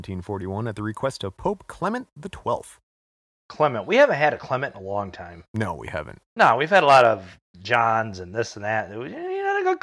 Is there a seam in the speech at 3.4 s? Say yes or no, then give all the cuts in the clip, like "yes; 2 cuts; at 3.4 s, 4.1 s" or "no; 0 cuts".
no; 1 cut; at 5.5 s